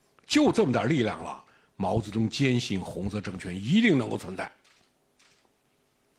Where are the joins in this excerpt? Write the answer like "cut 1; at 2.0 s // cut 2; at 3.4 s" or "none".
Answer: none